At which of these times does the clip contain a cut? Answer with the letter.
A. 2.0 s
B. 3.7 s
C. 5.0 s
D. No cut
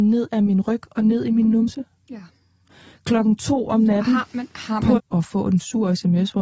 C